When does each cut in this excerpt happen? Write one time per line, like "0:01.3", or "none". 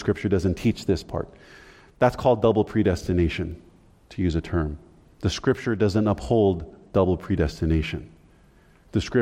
none